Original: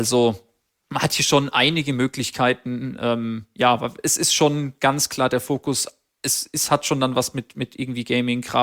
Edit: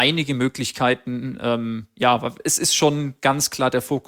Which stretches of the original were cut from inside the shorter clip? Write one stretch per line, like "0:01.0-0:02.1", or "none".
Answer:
none